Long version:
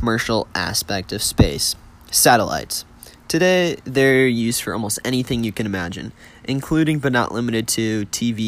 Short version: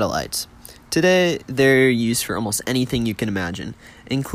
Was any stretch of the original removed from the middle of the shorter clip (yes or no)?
no